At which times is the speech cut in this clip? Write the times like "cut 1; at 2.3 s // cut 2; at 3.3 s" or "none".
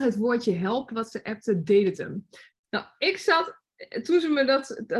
cut 1; at 2.5 s

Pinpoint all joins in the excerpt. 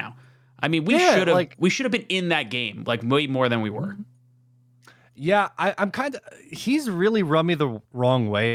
none

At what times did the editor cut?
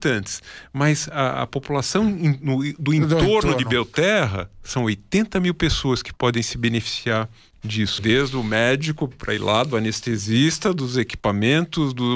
cut 1; at 8.0 s

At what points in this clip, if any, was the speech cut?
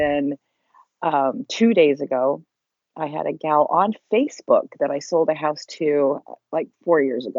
none

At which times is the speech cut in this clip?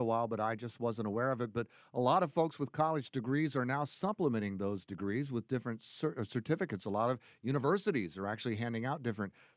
none

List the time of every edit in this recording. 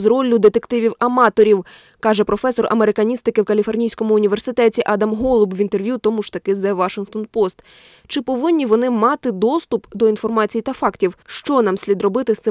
cut 1; at 11.2 s

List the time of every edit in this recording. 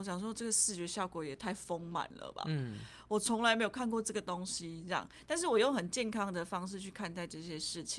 none

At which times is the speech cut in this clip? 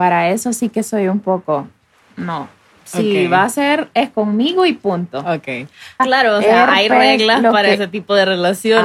cut 1; at 6.0 s

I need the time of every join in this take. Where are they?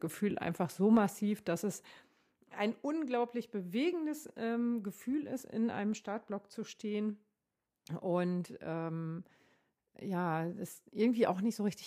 none

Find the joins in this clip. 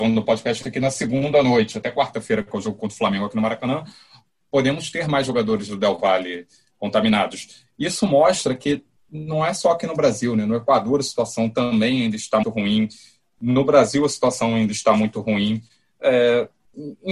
cut 1; at 12.4 s

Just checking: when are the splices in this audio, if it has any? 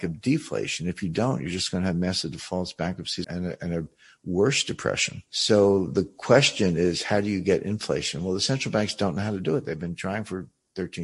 cut 1; at 3.2 s

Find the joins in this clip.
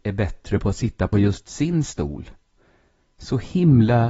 none

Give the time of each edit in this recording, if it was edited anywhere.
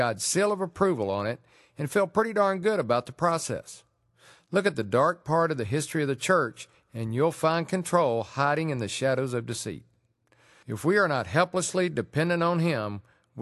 cut 1; at 10.6 s

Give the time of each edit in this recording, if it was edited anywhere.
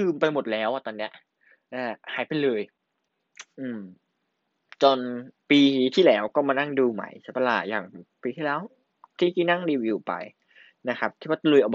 cut 1; at 2.0 s // cut 2; at 5.4 s

